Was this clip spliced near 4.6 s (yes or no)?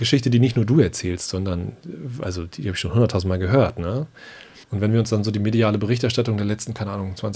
yes